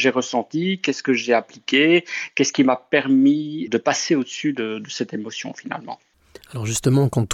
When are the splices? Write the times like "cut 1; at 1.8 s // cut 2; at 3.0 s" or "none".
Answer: cut 1; at 3.7 s